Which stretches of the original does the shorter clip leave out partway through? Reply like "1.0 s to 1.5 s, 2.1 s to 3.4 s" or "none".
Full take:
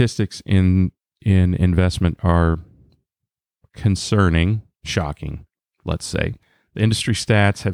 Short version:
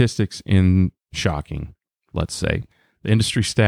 1.0 s to 4.8 s